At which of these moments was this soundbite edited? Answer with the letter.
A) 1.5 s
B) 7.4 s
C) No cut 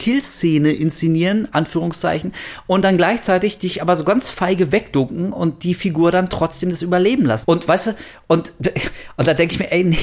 B